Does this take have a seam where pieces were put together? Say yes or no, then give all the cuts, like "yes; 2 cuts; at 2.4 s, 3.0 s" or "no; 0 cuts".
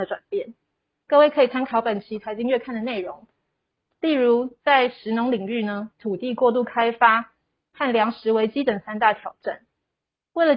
yes; 1 cut; at 5.9 s